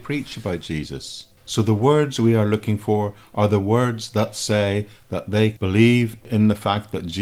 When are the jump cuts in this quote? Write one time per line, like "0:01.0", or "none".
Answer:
0:01.4